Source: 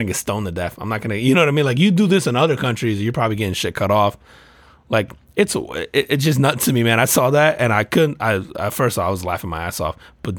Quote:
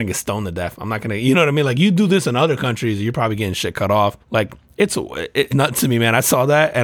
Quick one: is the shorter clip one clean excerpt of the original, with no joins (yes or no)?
no